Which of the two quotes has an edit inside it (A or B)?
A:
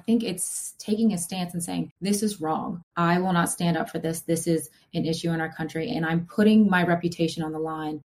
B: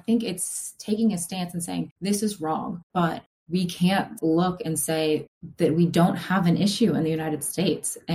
B